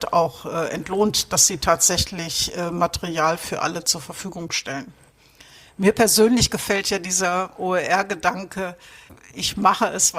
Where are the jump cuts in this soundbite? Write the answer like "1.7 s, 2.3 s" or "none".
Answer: none